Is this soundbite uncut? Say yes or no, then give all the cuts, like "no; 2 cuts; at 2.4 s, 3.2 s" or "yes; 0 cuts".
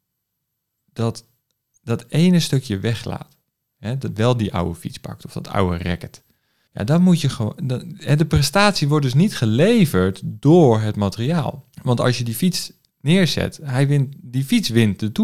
no; 2 cuts; at 6.7 s, 11.7 s